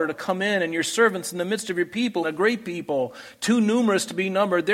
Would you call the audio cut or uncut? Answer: cut